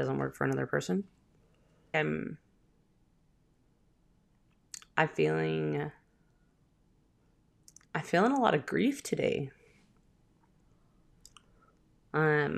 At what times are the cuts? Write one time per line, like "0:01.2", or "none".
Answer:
0:01.9